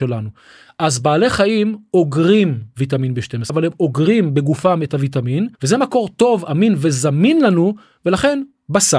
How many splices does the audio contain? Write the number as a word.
two